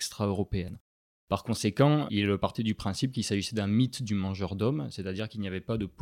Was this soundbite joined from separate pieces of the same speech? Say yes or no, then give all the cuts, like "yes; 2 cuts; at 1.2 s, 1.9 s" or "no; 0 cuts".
no; 0 cuts